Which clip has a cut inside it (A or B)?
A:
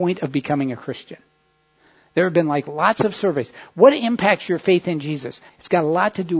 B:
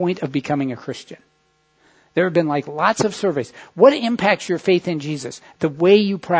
A